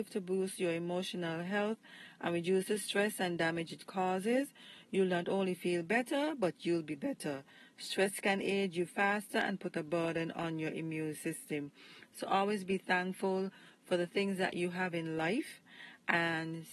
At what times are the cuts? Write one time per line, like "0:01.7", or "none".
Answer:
none